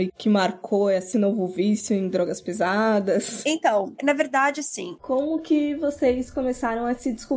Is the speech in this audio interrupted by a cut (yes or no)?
yes